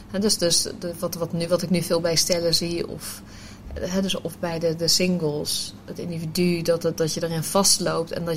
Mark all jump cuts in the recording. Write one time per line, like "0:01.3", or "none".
none